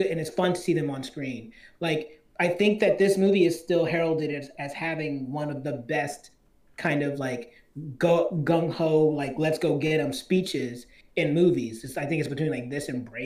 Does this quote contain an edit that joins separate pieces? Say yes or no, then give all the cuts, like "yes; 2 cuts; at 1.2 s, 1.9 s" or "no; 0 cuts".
no; 0 cuts